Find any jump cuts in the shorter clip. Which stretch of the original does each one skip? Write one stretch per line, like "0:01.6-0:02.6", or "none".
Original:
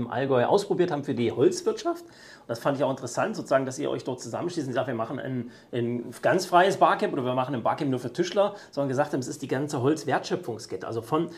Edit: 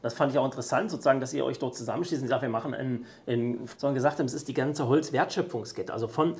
0:06.2-0:08.7